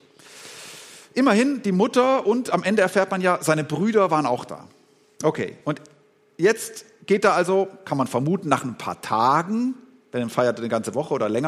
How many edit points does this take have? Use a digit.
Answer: 0